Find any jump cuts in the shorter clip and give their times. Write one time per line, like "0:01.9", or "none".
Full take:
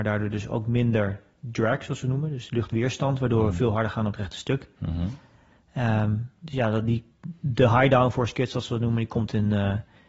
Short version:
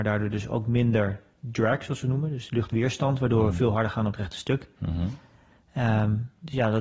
none